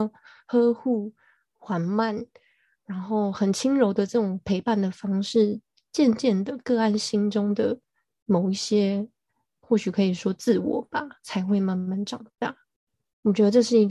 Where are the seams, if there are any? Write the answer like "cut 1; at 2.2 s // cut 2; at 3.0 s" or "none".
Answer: none